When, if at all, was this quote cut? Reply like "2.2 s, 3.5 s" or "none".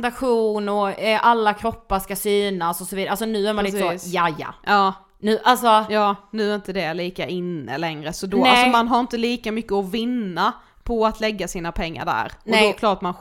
none